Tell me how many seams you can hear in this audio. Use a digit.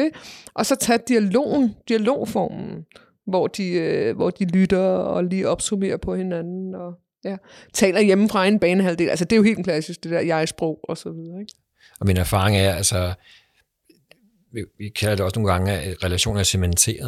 0